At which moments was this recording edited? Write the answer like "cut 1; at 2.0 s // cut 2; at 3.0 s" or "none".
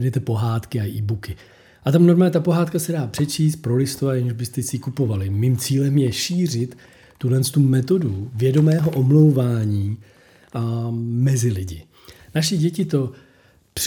cut 1; at 12.2 s